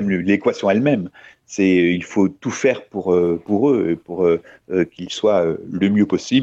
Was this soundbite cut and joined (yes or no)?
no